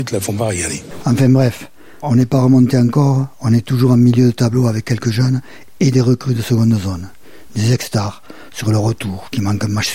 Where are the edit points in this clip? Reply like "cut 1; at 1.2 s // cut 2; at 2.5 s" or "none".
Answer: cut 1; at 2.0 s